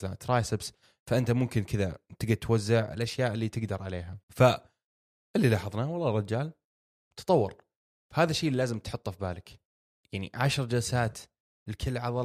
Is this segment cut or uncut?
cut